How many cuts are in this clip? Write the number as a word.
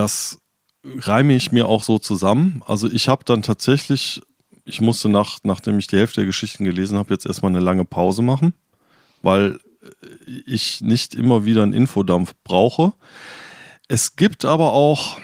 zero